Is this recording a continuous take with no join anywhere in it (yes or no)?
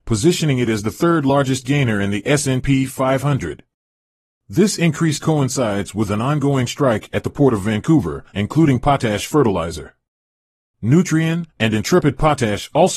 no